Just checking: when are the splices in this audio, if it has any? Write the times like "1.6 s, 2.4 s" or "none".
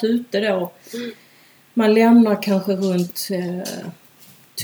none